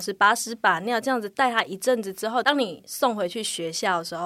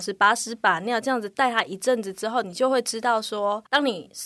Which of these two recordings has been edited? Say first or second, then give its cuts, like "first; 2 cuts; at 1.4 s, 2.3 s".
first; 1 cut; at 2.4 s